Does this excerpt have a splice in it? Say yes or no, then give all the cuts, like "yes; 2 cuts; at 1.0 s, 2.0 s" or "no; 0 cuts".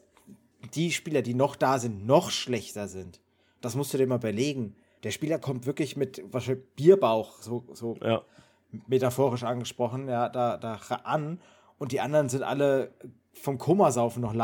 yes; 1 cut; at 6.3 s